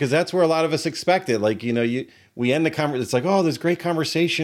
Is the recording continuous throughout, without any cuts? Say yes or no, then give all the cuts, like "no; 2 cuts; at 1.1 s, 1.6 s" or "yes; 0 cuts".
yes; 0 cuts